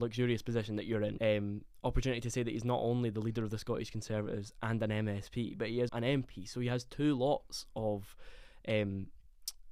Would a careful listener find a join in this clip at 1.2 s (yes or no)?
yes